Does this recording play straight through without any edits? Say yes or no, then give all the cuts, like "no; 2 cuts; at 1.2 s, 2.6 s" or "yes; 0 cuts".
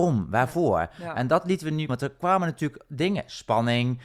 no; 1 cut; at 1.9 s